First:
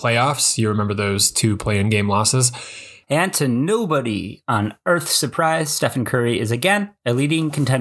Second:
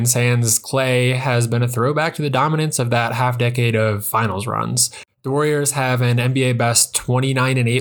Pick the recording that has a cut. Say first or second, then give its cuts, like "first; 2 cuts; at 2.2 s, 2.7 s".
first; 1 cut; at 3.0 s